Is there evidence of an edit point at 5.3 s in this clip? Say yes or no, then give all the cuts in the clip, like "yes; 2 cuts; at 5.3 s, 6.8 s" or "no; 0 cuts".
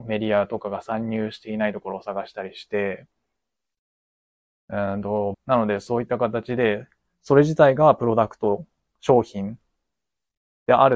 yes; 1 cut; at 5.3 s